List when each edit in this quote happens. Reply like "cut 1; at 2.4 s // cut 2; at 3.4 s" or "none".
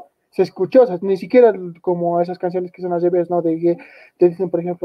none